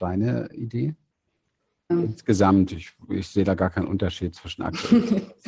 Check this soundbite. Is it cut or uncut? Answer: cut